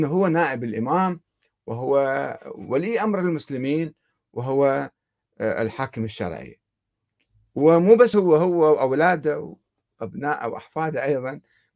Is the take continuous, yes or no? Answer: yes